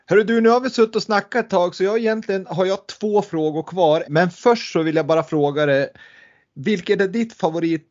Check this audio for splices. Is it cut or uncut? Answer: cut